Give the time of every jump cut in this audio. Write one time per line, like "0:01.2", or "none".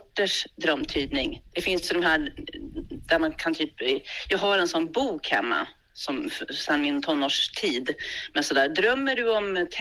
none